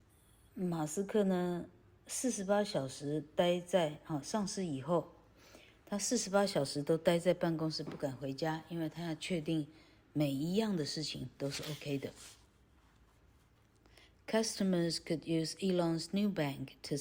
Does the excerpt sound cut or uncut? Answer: uncut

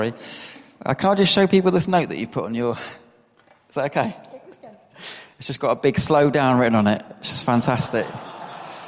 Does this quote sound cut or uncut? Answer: uncut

